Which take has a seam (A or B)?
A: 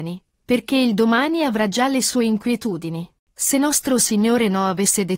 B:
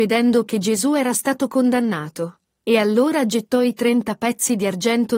A